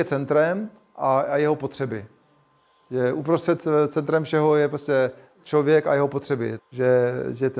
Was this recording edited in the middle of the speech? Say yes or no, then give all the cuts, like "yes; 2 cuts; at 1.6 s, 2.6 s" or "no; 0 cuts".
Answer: yes; 1 cut; at 6.6 s